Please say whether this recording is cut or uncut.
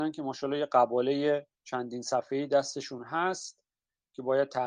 cut